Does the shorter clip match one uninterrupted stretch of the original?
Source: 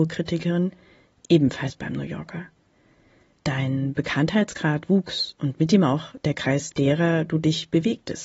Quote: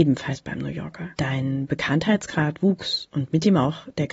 no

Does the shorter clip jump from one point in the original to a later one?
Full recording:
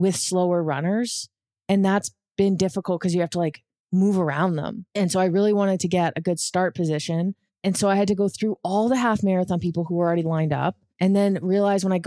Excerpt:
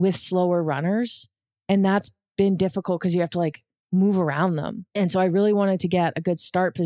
no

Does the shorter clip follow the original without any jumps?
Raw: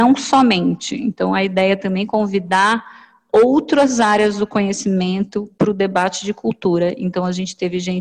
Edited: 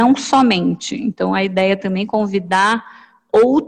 yes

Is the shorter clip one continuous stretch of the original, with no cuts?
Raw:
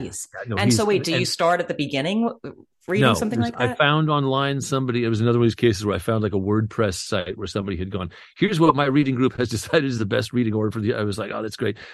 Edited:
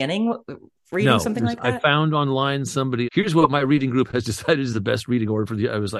no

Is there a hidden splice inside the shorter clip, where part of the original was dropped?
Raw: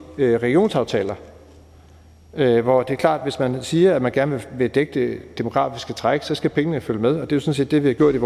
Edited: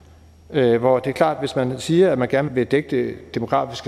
yes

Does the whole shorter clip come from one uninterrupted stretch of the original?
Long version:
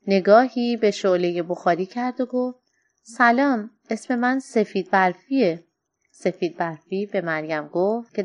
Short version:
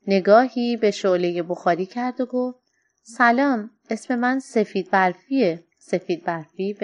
no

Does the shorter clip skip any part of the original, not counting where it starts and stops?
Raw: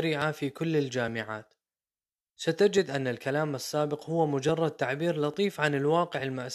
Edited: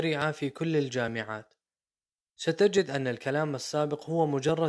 no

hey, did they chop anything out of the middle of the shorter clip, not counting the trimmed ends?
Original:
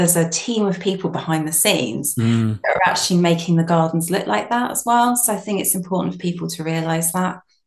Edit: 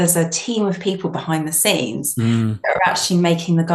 no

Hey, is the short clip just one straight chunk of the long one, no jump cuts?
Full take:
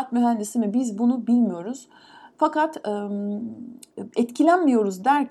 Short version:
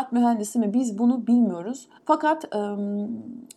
no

